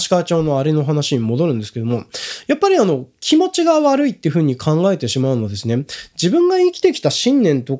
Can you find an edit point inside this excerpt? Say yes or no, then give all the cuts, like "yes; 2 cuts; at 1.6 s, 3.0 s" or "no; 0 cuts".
no; 0 cuts